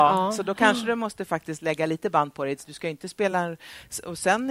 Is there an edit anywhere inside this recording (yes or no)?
no